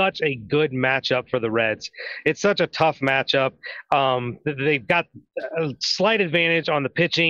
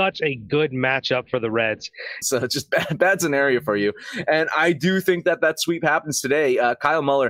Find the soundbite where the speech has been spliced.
second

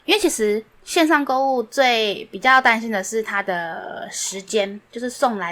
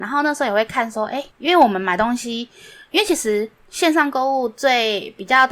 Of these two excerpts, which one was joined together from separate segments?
second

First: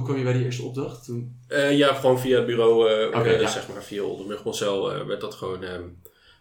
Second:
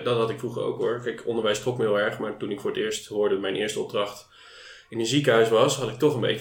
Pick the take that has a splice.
first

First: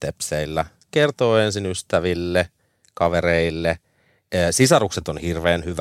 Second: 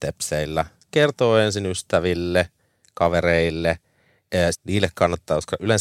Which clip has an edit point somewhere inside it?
second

